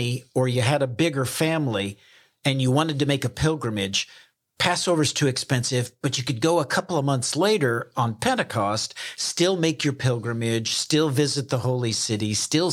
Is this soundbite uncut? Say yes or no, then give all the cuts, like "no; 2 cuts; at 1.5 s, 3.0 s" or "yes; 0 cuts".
yes; 0 cuts